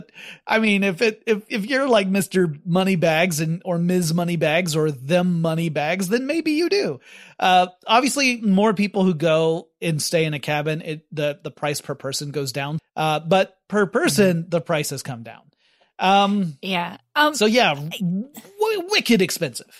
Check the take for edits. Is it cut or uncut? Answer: cut